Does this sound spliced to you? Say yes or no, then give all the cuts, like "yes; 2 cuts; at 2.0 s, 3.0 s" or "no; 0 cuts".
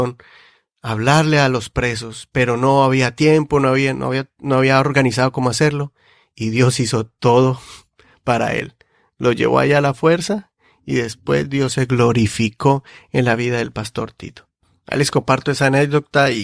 no; 0 cuts